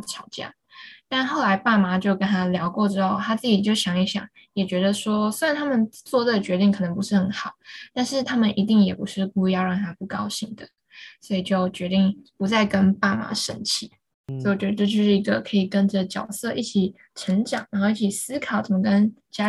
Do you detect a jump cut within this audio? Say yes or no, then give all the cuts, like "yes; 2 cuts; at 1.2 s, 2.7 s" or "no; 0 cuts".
no; 0 cuts